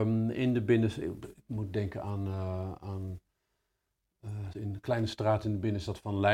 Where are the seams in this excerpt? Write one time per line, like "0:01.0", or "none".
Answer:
0:04.5